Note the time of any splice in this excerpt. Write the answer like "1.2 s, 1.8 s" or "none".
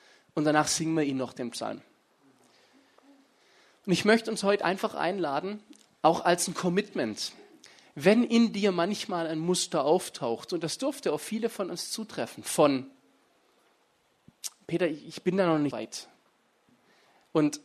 15.7 s